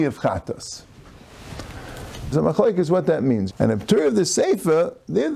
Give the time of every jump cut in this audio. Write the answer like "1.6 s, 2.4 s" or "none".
2.3 s, 3.5 s